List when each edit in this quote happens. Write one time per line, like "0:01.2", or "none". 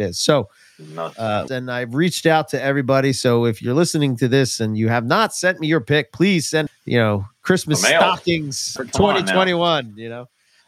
0:01.5
0:06.7
0:08.8